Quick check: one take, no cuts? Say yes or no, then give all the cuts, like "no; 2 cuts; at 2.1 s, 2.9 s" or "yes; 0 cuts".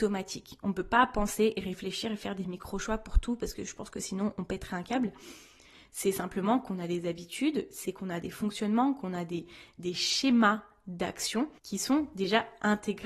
no; 1 cut; at 11.6 s